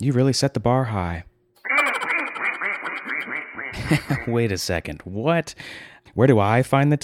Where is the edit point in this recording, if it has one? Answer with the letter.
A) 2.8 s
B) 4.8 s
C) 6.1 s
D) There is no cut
C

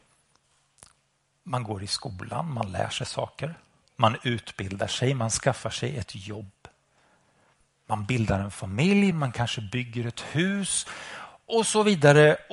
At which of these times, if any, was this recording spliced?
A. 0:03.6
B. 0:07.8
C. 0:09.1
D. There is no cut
C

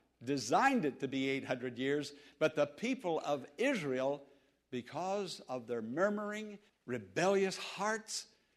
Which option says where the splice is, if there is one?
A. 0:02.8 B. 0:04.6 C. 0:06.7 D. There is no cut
C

